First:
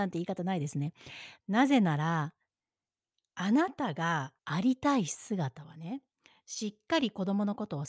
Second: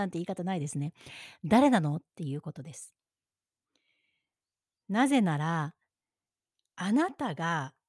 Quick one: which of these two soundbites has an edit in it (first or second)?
first